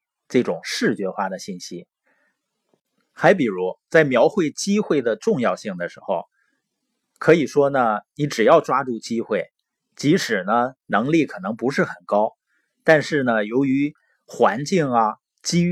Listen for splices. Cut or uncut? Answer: uncut